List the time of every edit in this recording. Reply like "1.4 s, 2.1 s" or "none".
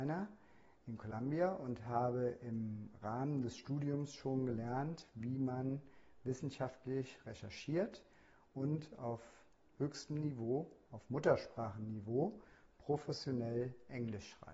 none